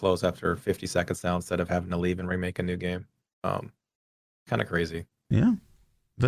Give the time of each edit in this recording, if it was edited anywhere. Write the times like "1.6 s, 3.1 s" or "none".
5.2 s